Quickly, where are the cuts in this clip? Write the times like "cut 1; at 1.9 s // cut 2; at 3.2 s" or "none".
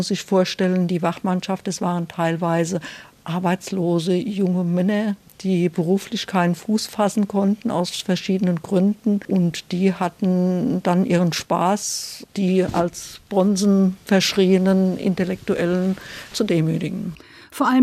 none